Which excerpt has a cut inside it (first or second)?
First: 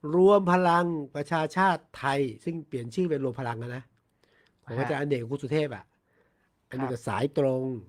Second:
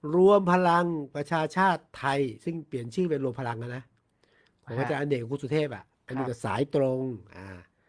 second